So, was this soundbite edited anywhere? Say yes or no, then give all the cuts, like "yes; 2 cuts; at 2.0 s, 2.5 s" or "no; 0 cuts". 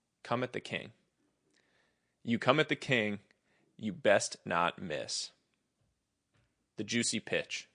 no; 0 cuts